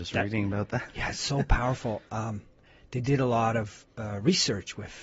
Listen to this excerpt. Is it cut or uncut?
uncut